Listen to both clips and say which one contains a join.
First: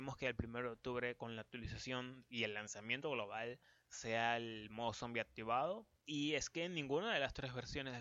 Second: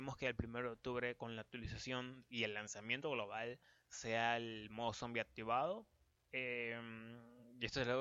first; 1 cut; at 6.0 s

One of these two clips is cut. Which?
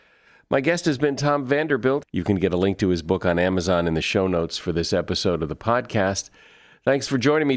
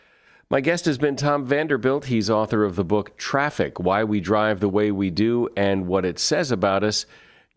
first; 1 cut; at 2.0 s

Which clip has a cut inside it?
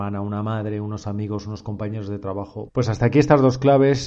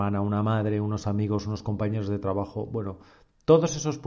first; 1 cut; at 2.7 s

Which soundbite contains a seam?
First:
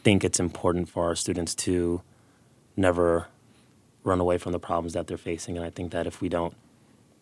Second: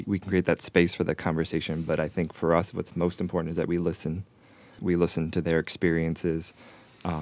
second; 1 cut; at 4.8 s

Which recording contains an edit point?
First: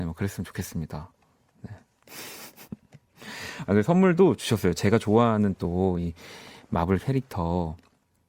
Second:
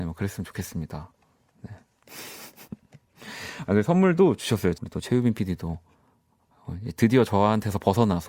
second; 1 cut; at 4.7 s

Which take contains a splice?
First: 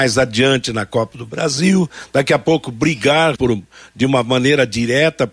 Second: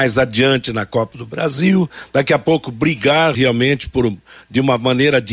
first; 1 cut; at 3.3 s

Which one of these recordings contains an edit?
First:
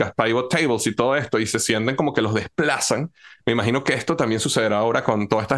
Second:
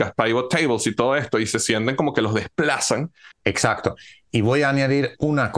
second; 1 cut; at 3.3 s

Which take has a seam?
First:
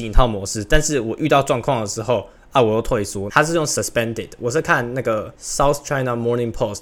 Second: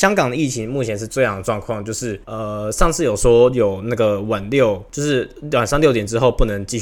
first; 1 cut; at 3.3 s

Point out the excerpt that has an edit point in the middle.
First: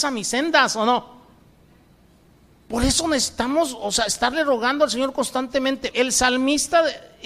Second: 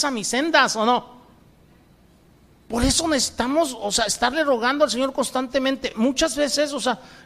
first; 1 cut; at 5.9 s

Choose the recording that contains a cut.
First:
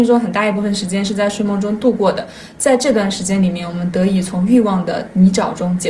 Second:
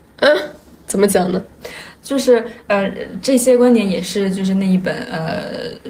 second; 1 cut; at 3.2 s

